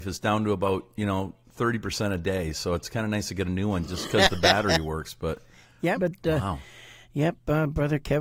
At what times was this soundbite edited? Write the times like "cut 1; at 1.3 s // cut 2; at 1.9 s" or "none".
cut 1; at 6.0 s